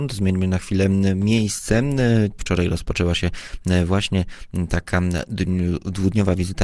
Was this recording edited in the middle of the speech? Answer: yes; 1 cut; at 2.4 s

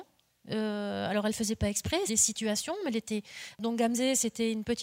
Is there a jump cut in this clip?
yes; 2 cuts; at 2.1 s, 3.5 s

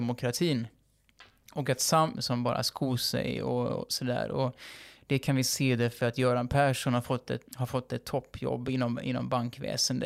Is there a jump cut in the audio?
yes; 2 cuts; at 2.1 s, 7.5 s

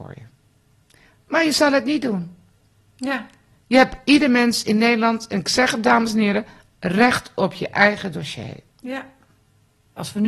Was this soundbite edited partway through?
no; 0 cuts

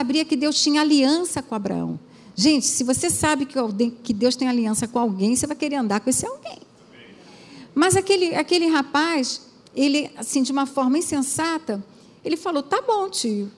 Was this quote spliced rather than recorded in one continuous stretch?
no; 0 cuts

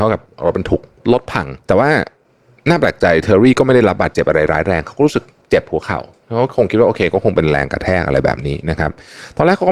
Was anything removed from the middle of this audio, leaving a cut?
no; 0 cuts

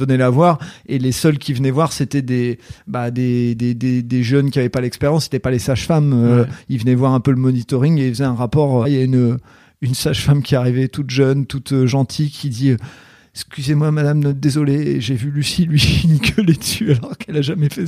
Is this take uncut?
no; 1 cut; at 8.8 s

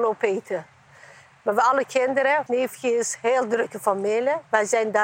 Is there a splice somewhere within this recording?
yes; 1 cut; at 2.5 s

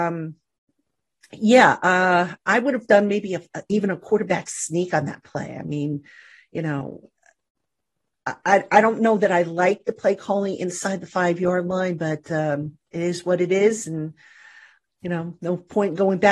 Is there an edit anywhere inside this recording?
no; 0 cuts

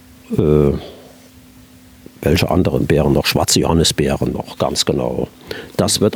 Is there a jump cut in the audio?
no; 0 cuts

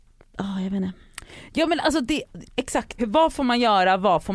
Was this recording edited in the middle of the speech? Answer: yes; 1 cut; at 3.0 s

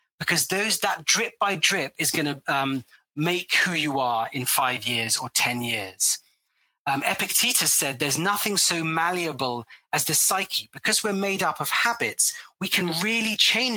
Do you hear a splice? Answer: no; 0 cuts

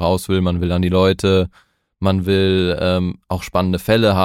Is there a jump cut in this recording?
no; 0 cuts

